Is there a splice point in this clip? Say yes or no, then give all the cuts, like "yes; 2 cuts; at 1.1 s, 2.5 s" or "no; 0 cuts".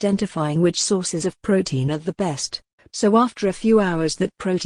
yes; 1 cut; at 2.8 s